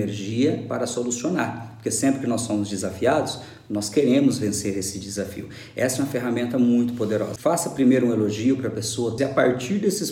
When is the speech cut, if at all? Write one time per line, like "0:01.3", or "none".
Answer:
0:07.4
0:09.2